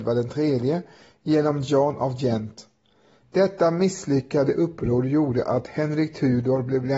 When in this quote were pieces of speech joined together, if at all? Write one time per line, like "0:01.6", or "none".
0:03.2